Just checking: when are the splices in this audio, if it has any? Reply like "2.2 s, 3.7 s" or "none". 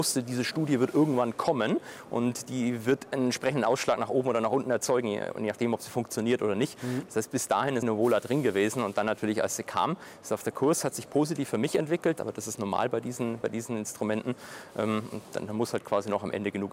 7.8 s, 12.2 s